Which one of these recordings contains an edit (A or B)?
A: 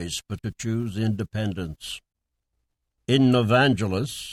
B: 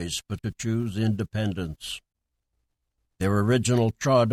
B